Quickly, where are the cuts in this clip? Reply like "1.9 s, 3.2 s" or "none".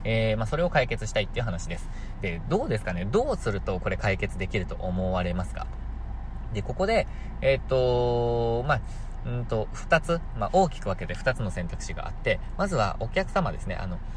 2.1 s

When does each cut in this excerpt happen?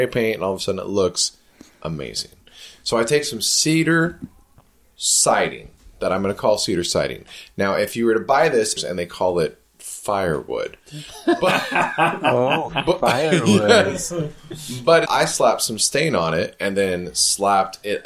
8.8 s, 15.1 s

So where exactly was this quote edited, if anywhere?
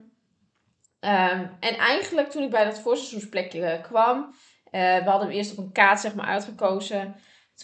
none

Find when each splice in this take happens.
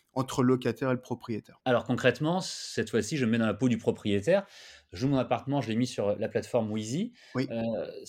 none

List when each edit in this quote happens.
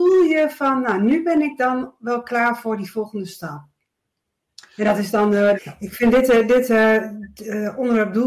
5.6 s

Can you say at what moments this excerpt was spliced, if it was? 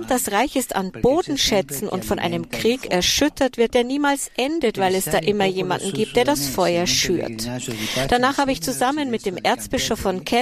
none

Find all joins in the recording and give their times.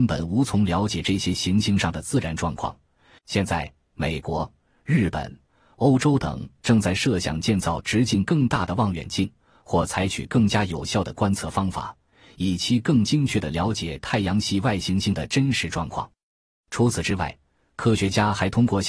3.2 s

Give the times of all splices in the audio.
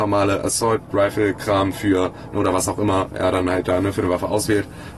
none

